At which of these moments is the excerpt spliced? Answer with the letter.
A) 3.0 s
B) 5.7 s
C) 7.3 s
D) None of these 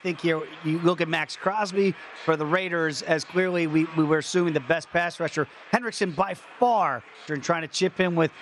C